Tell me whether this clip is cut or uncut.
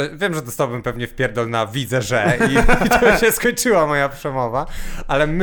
uncut